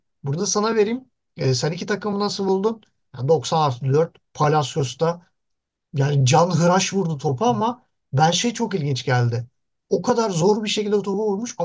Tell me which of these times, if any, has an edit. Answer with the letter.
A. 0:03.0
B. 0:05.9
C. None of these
A